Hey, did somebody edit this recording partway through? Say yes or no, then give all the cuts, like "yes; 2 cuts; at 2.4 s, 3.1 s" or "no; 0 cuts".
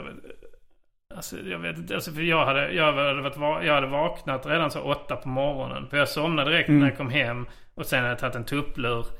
no; 0 cuts